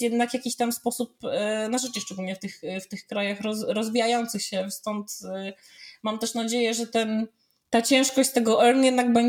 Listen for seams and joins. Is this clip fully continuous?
yes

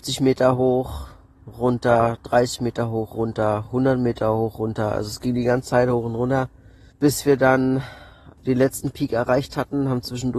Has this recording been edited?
no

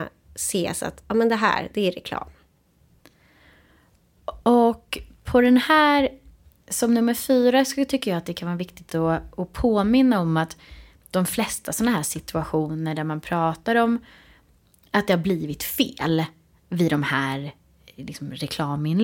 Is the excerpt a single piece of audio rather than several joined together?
yes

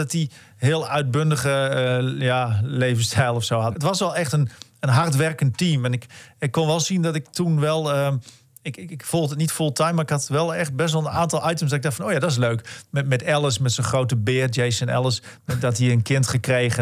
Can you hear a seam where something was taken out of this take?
yes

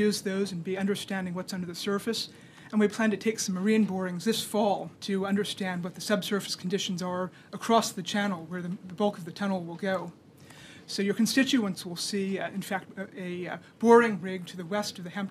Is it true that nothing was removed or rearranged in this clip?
no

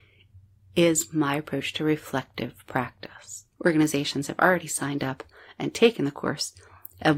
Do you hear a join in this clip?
yes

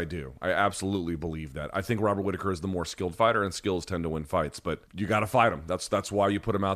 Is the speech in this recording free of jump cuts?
no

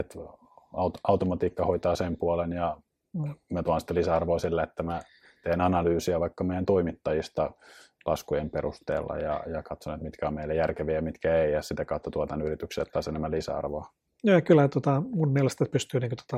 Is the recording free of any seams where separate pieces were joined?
yes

